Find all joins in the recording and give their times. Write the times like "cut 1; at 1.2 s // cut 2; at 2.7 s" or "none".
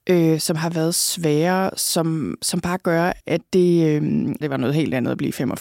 cut 1; at 3.2 s // cut 2; at 4.4 s